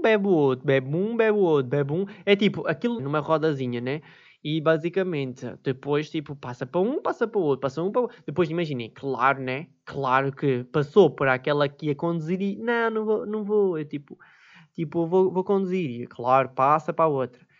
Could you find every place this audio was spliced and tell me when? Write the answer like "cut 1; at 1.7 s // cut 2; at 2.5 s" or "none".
cut 1; at 3.0 s